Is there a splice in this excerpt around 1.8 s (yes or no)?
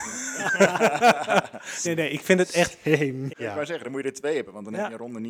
yes